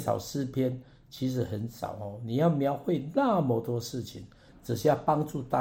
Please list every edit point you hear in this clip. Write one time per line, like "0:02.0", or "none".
0:04.5